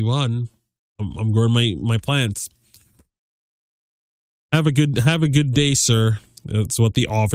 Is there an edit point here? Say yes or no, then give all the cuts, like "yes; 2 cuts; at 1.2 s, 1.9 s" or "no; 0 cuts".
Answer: no; 0 cuts